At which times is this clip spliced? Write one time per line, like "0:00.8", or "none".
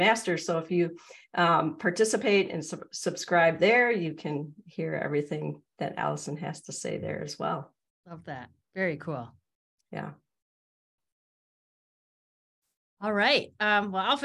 none